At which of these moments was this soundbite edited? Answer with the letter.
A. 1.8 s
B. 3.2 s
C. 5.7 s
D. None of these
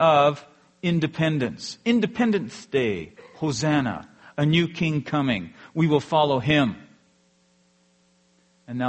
D